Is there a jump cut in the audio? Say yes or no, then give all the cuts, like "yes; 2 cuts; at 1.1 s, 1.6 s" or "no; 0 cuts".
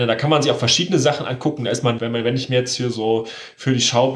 yes; 1 cut; at 2.0 s